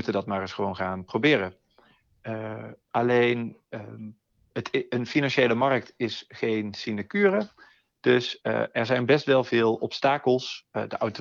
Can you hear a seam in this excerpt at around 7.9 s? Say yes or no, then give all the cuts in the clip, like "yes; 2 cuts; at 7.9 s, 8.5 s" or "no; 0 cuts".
no; 1 cut; at 3.6 s